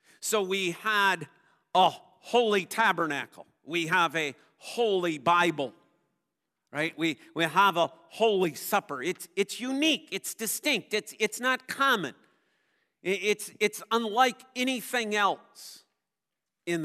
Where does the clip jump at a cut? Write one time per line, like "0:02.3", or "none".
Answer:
none